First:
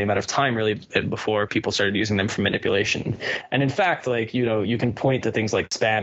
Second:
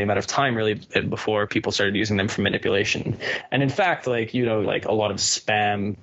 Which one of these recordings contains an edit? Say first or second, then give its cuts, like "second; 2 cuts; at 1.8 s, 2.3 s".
second; 1 cut; at 4.6 s